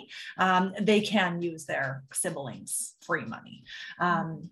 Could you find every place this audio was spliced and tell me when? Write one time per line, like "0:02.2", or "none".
0:03.0